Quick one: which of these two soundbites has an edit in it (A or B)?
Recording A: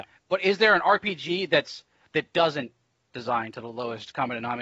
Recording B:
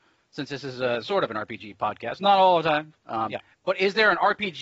B